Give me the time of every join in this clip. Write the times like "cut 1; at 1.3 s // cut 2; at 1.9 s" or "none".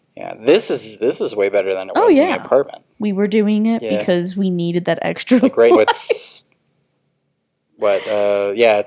cut 1; at 2.9 s // cut 2; at 5.8 s